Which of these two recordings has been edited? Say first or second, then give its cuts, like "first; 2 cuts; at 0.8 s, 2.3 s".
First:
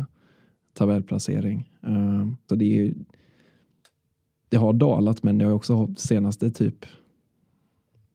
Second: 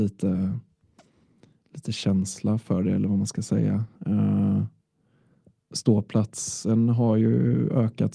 first; 1 cut; at 2.5 s